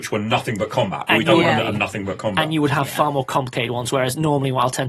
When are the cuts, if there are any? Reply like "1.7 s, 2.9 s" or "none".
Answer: 1.6 s